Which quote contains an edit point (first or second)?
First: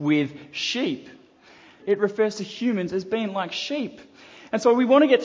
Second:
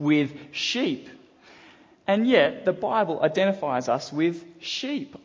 first